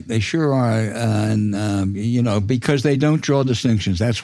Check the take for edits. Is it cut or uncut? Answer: uncut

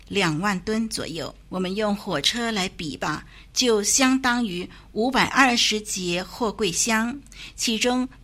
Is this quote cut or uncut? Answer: cut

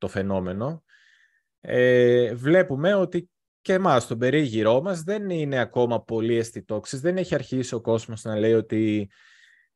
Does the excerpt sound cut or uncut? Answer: uncut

